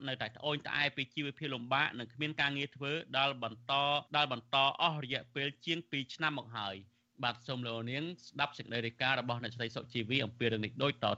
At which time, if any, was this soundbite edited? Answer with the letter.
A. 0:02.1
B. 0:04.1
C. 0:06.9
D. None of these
B